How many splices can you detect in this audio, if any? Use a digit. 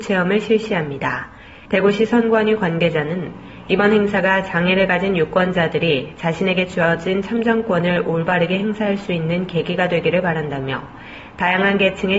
1